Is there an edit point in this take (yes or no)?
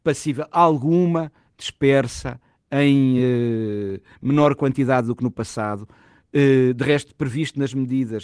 no